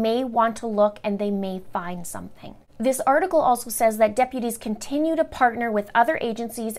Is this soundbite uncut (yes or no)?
yes